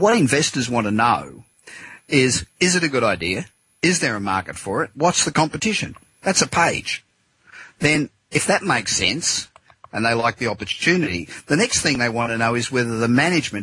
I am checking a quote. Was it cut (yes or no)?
yes